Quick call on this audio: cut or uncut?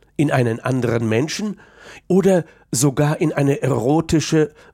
cut